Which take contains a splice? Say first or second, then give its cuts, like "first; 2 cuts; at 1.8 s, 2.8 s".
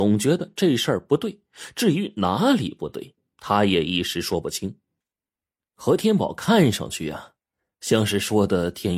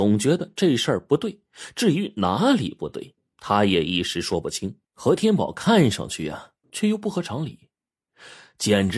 second; 2 cuts; at 4.8 s, 6.6 s